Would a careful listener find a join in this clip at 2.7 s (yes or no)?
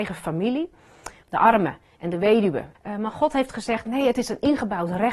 yes